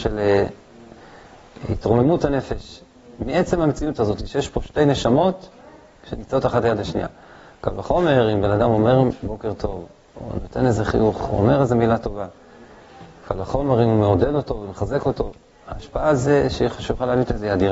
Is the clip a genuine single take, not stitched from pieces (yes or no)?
yes